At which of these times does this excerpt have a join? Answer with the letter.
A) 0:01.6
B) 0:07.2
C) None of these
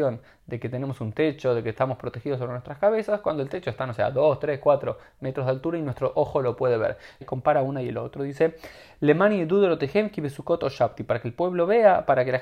B